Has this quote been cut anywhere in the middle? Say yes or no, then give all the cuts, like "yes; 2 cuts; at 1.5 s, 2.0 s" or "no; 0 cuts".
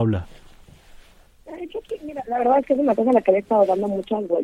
no; 0 cuts